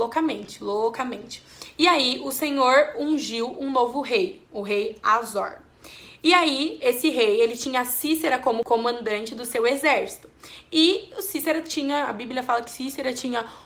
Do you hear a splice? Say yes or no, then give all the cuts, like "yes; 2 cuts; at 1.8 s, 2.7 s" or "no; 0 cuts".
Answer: no; 0 cuts